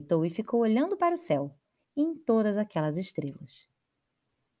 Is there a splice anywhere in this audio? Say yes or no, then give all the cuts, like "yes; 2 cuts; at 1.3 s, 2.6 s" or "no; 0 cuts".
yes; 1 cut; at 1.8 s